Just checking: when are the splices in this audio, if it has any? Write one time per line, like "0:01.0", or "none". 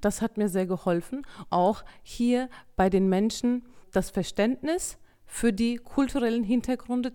0:01.5